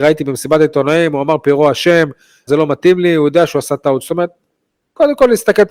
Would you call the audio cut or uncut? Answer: cut